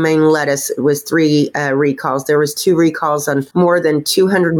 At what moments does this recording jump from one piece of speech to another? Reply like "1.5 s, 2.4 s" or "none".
3.5 s